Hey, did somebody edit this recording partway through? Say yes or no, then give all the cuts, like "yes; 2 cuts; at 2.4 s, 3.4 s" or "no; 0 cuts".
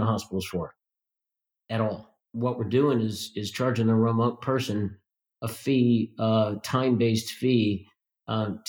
no; 0 cuts